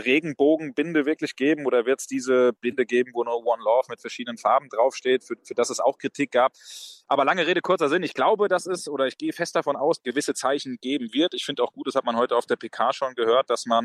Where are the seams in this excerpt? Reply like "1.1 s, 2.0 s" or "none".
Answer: 7.0 s, 10.0 s